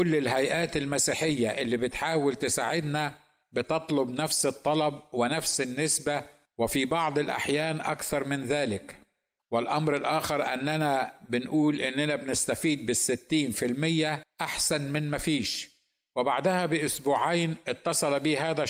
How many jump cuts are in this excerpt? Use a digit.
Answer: 0